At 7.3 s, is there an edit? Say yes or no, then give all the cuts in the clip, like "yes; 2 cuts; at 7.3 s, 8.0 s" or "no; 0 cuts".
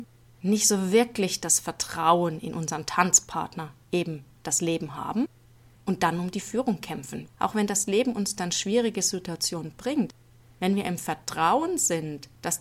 yes; 1 cut; at 7.3 s